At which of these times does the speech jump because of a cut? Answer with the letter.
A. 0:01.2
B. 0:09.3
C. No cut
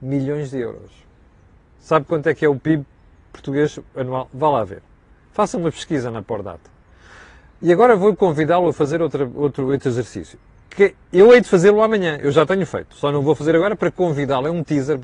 C